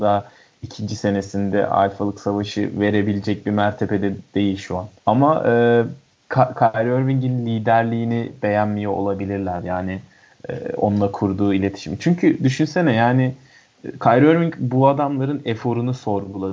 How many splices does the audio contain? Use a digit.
1